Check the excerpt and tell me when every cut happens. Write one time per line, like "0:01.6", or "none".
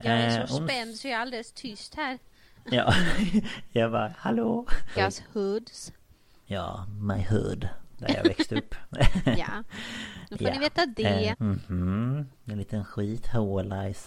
0:05.0
0:11.3